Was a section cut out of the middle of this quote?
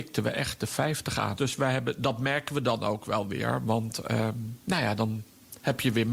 yes; 1 cut; at 1.4 s

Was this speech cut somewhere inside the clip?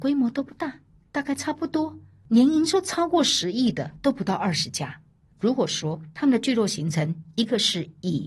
no; 0 cuts

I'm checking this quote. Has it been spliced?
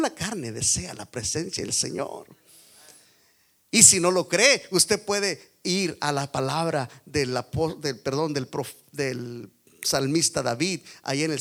no; 0 cuts

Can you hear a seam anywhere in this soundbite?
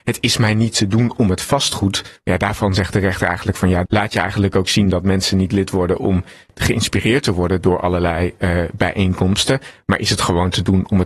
yes; 2 cuts; at 2.2 s, 3.8 s

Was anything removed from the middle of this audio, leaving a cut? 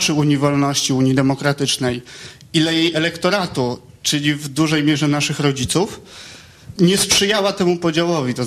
yes; 1 cut; at 6.8 s

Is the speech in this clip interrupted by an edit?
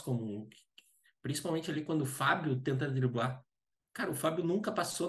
yes; 1 cut; at 1.2 s

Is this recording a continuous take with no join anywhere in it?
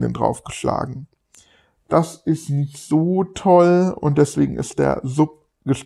yes; 0 cuts

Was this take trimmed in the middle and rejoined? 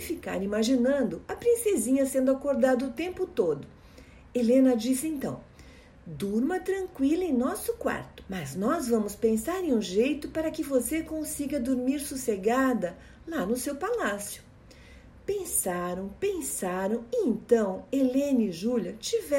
yes; 1 cut; at 8.3 s

